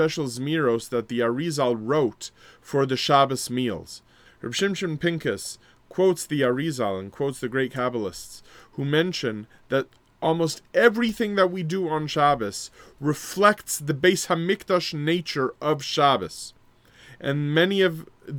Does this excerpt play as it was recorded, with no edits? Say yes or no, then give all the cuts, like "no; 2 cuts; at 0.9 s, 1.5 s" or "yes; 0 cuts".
no; 1 cut; at 4.2 s